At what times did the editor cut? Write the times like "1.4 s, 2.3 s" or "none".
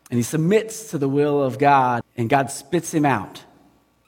2.0 s